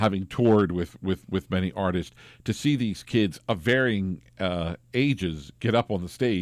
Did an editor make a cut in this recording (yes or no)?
no